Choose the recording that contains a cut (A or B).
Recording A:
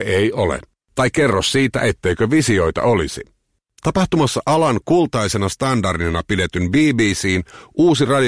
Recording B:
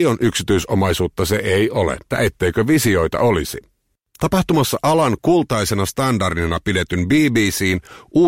B